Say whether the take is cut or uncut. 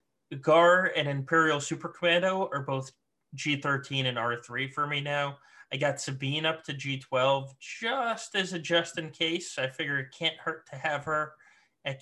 uncut